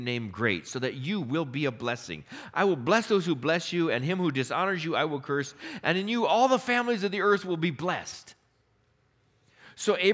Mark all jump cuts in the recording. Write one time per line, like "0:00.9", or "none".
none

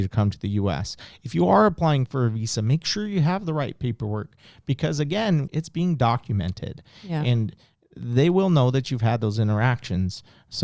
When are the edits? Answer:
0:05.5

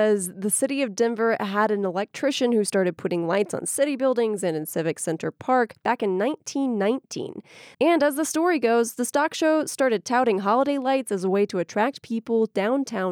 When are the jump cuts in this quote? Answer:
0:07.7

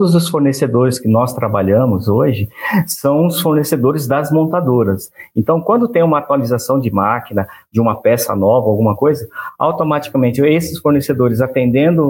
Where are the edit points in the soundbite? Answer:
none

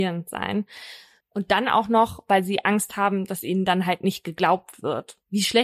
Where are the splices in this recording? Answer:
0:01.2

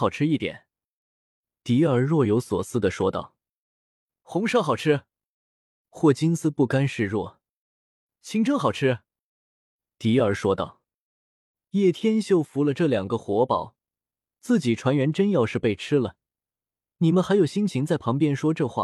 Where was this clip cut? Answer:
none

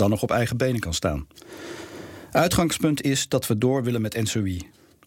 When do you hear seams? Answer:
none

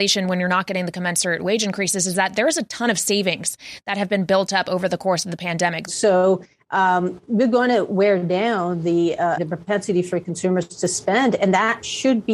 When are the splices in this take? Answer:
0:05.9
0:09.4

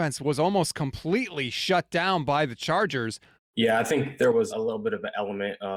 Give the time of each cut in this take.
0:03.3
0:04.5

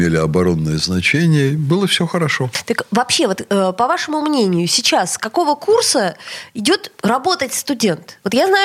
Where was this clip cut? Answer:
none

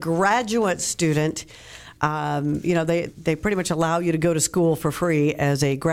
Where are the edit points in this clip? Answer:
0:03.1

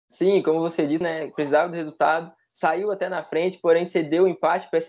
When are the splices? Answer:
0:01.0

